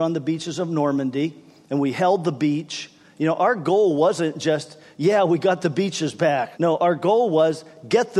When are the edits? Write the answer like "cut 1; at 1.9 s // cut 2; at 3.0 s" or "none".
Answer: cut 1; at 6.5 s

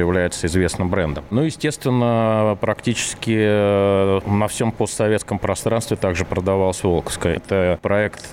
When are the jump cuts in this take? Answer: cut 1; at 7.4 s

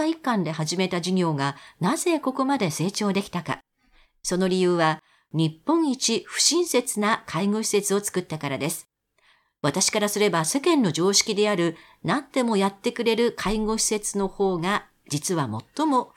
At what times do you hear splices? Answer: none

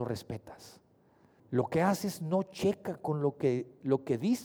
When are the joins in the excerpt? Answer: cut 1; at 1.4 s

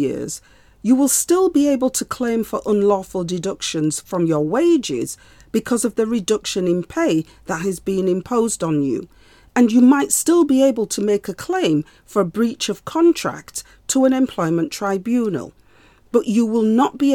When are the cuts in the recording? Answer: none

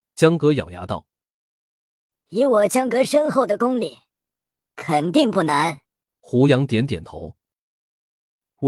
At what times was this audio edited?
cut 1; at 4.6 s // cut 2; at 6.1 s

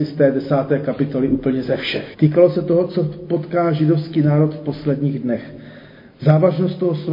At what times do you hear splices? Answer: cut 1; at 2.1 s

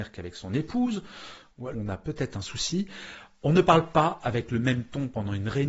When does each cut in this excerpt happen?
cut 1; at 1.7 s

